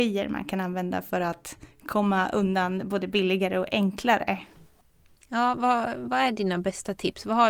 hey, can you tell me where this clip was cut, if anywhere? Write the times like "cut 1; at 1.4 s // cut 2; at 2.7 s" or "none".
none